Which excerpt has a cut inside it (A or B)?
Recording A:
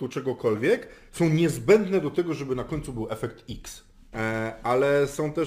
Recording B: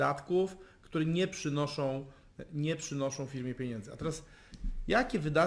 A